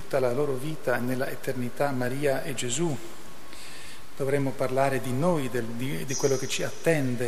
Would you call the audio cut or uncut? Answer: uncut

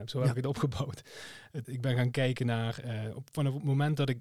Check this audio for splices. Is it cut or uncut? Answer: cut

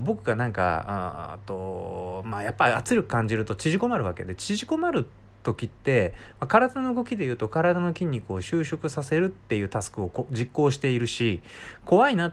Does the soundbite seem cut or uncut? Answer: uncut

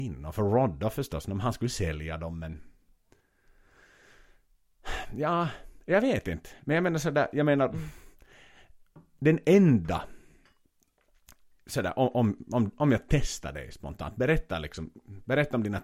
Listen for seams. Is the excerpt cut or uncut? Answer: uncut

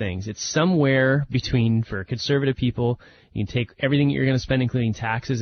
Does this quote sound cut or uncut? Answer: uncut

